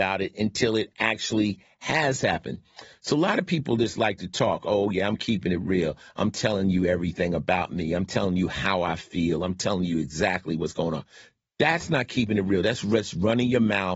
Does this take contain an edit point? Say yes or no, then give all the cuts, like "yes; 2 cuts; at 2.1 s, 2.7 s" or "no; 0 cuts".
no; 0 cuts